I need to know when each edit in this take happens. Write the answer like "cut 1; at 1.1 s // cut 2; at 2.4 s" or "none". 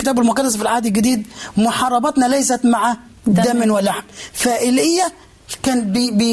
none